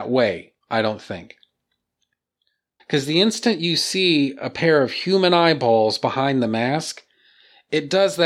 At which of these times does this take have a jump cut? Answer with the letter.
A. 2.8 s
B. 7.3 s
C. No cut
A